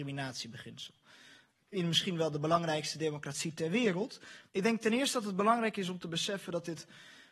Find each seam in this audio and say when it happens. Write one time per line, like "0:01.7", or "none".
0:01.6
0:04.5